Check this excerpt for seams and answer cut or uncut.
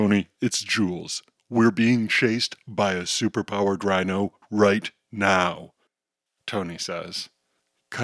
cut